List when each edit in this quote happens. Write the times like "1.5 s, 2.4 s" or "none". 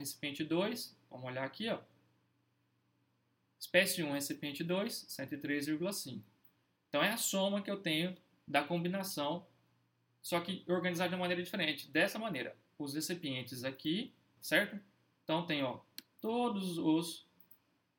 14.4 s